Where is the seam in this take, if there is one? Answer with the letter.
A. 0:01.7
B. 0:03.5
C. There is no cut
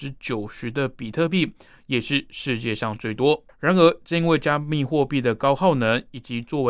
B